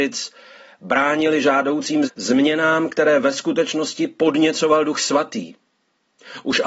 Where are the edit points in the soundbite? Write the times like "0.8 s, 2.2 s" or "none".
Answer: 2.1 s